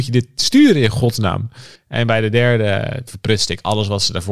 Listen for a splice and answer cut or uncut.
cut